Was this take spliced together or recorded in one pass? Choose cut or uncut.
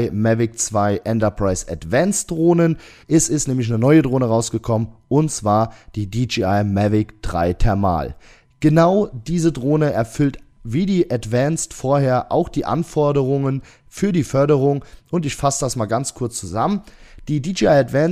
cut